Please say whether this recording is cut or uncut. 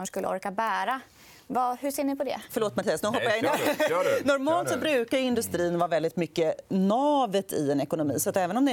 cut